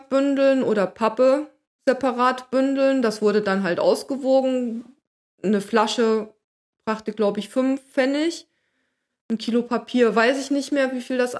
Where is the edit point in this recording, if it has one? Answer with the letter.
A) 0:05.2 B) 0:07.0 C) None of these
C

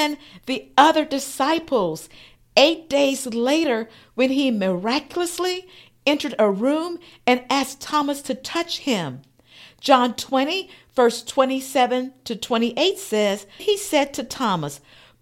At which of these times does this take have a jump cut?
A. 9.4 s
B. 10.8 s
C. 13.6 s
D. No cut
C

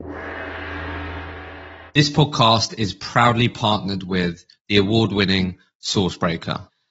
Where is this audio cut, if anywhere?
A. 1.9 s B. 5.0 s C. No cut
A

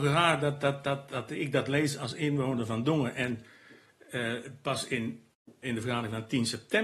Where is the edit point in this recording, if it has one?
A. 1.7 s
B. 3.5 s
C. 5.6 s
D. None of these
C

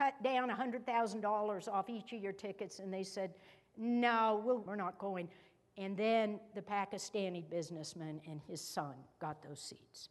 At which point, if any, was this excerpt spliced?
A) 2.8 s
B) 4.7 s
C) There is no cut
B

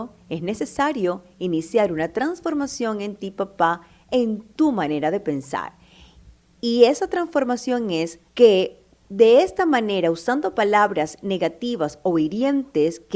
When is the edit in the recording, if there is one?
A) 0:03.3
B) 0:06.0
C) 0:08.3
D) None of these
C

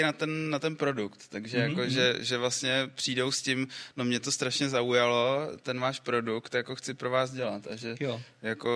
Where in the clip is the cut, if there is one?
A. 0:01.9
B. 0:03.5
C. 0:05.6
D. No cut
D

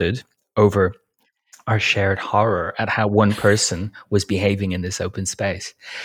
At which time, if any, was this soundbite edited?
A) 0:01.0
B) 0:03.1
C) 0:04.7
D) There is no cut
D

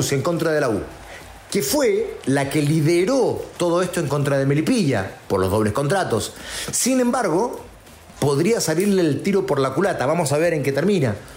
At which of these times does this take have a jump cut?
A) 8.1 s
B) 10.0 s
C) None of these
A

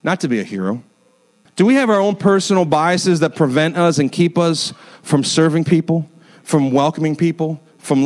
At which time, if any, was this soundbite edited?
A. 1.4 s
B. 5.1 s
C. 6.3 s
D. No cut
A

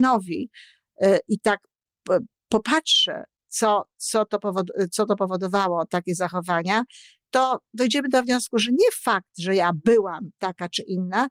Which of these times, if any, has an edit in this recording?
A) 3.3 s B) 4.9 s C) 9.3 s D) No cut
D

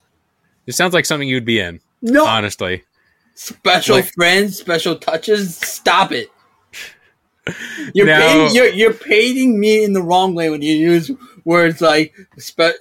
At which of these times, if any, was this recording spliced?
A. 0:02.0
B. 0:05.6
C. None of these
C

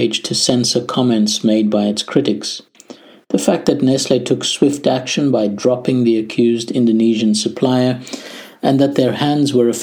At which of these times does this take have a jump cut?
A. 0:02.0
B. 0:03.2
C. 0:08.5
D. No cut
D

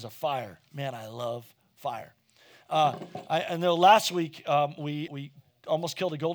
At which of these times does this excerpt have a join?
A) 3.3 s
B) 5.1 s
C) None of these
B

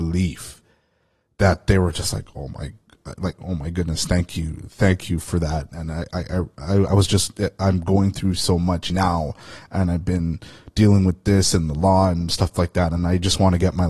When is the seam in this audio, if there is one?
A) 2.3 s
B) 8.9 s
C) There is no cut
B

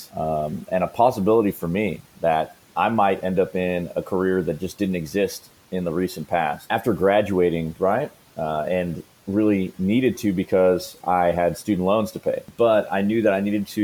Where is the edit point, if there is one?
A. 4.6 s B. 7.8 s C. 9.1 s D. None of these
B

